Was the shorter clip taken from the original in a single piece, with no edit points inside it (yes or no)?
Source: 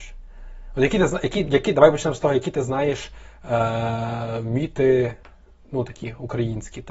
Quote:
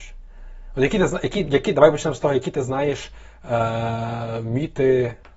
yes